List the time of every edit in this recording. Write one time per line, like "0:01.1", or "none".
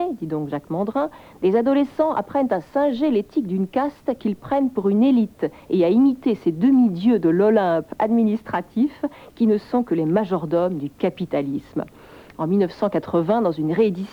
none